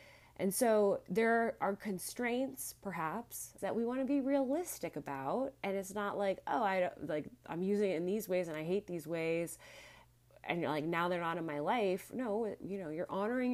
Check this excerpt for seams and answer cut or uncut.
cut